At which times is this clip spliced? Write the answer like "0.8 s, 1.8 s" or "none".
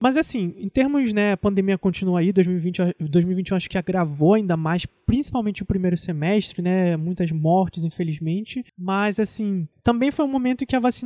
8.7 s